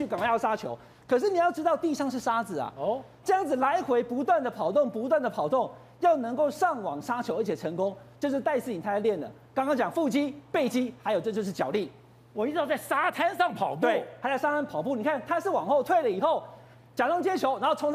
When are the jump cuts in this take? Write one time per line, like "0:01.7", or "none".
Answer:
none